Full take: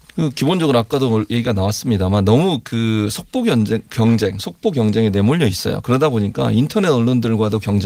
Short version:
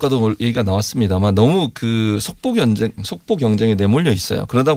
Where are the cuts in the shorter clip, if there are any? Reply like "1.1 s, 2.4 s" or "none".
3.0 s